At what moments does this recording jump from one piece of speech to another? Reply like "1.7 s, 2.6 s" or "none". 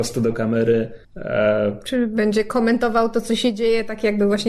1.0 s